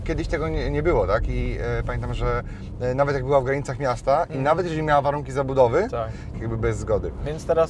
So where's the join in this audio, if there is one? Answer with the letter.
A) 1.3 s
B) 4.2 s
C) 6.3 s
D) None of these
C